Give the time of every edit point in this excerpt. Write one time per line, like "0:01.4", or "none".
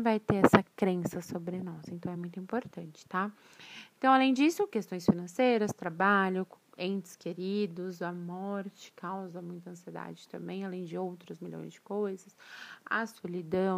none